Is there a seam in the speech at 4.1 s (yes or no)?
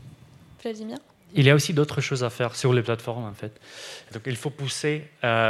yes